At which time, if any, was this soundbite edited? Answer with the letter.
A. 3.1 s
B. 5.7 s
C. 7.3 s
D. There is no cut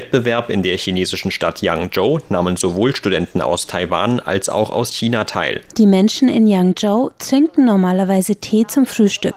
B